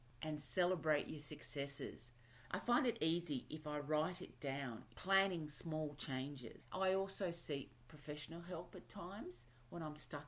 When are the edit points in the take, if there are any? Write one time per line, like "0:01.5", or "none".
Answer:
0:02.5
0:06.7